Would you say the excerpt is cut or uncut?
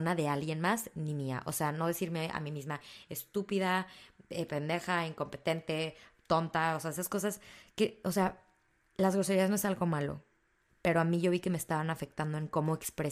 uncut